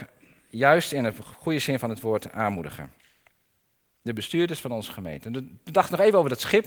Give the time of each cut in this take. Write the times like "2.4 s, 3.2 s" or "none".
none